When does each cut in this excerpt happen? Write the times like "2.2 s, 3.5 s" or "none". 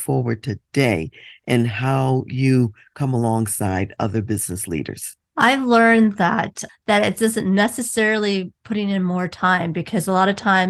5.3 s, 6.7 s